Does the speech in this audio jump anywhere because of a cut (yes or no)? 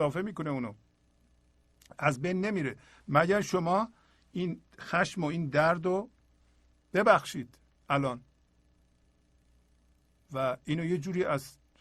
no